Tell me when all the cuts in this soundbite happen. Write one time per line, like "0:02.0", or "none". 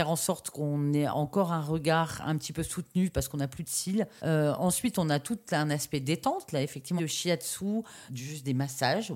0:04.2
0:07.0
0:08.1